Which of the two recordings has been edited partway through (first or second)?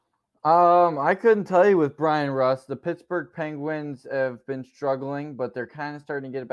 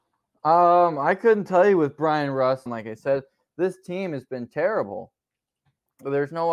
second